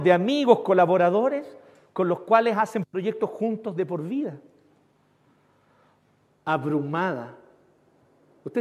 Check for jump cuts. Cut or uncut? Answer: cut